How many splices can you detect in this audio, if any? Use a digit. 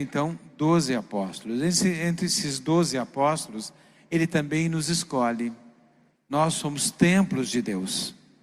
1